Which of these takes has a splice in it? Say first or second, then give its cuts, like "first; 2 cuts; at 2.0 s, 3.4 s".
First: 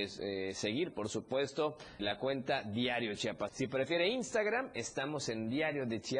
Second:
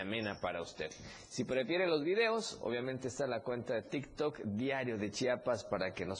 first; 2 cuts; at 2.0 s, 3.5 s